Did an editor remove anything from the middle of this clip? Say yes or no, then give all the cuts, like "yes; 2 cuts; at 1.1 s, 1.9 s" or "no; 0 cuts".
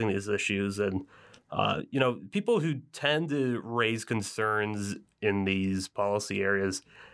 no; 0 cuts